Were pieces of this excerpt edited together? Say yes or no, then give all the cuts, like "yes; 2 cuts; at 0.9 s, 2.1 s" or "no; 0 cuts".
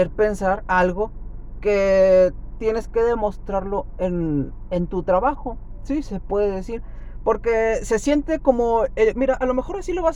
yes; 1 cut; at 9.1 s